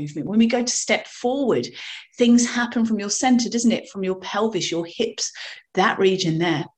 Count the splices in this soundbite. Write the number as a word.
zero